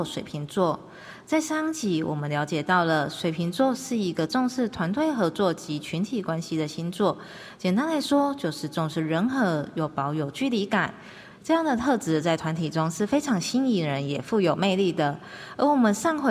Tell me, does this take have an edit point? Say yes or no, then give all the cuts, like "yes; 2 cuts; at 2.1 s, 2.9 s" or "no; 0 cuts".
yes; 1 cut; at 11.3 s